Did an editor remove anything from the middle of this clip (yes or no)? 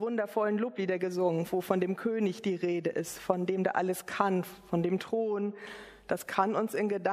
no